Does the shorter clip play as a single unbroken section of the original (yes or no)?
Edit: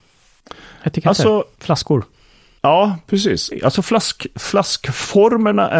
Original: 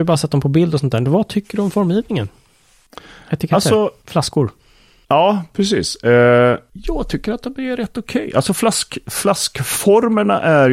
no